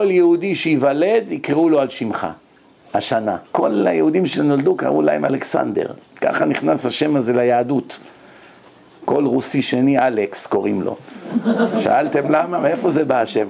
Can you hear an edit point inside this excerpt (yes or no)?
yes